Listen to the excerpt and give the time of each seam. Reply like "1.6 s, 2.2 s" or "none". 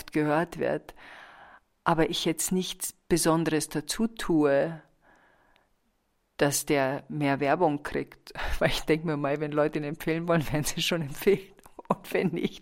none